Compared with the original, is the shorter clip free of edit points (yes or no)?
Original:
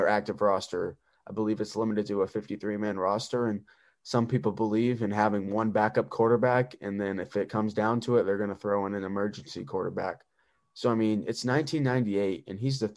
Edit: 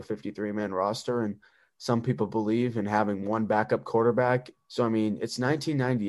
no